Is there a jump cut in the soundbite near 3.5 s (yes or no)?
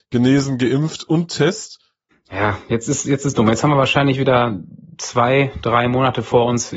no